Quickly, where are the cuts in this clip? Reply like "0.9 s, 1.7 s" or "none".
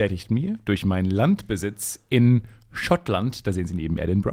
none